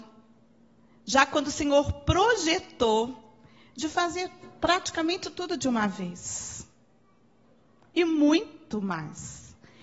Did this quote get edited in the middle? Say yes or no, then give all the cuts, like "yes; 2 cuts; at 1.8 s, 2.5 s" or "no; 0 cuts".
no; 0 cuts